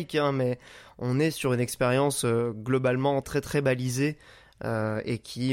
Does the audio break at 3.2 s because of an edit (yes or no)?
yes